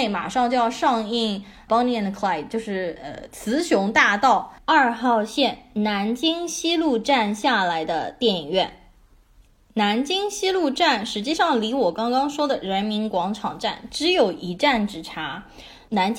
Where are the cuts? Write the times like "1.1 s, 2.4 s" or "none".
4.6 s